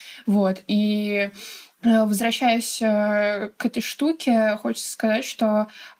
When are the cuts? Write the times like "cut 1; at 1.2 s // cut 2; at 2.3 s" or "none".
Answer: cut 1; at 1.7 s